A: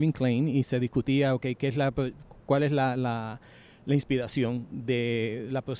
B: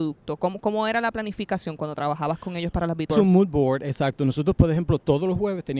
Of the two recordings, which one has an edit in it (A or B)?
B